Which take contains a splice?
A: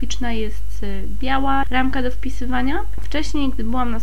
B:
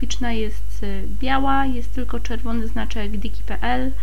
A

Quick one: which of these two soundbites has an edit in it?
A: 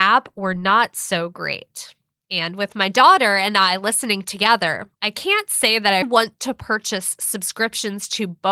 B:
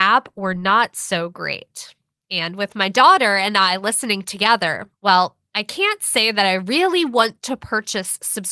A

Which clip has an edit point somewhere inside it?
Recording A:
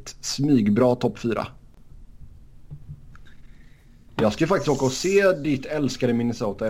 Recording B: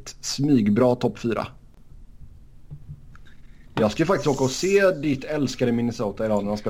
B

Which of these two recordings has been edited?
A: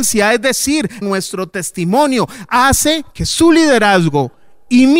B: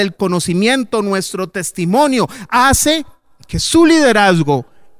A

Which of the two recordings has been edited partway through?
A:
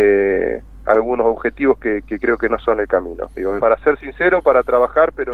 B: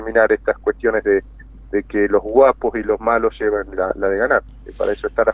A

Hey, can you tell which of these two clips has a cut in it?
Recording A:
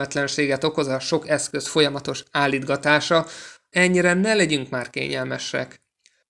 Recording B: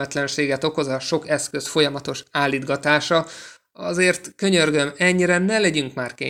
A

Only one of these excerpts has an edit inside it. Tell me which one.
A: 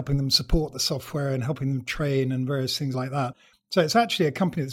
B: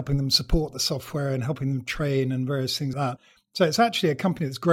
B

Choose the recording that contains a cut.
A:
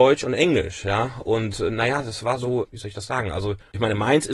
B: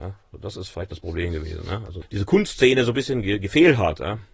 B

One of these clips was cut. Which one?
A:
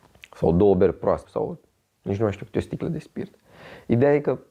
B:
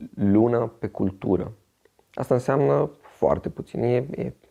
A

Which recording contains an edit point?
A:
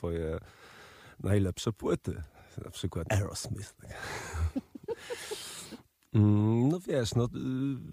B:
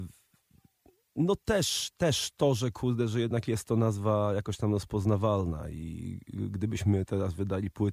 A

